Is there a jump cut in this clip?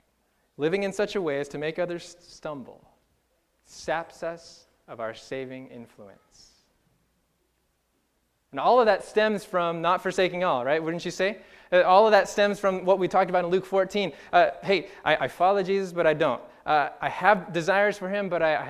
no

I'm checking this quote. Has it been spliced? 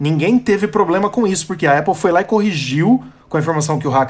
no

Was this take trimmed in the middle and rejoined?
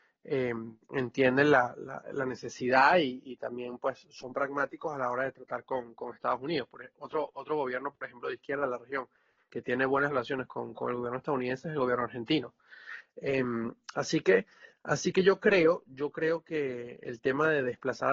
no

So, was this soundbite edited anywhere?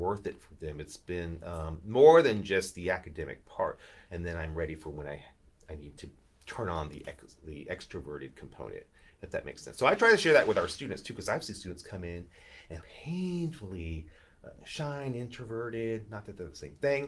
yes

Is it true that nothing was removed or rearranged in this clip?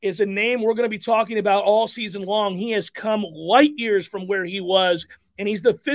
yes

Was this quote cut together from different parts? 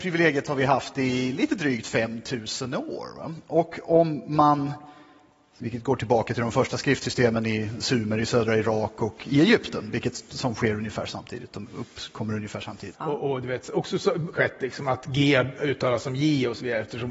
yes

